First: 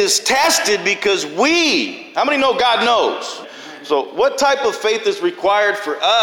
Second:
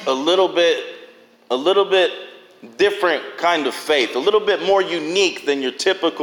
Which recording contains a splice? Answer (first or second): first